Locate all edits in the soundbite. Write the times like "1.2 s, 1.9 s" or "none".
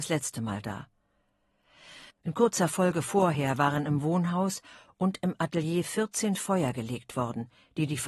2.1 s